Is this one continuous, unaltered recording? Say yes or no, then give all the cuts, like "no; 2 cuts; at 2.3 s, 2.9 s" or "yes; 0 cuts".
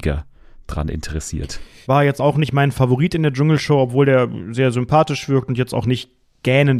no; 1 cut; at 1.9 s